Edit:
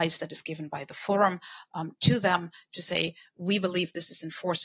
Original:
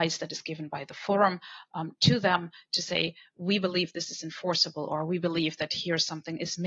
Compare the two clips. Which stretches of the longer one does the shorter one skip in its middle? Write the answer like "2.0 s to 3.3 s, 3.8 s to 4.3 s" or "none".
none